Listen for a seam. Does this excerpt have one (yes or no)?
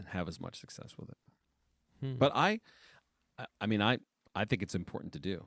no